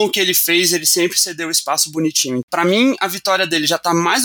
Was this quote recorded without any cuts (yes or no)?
no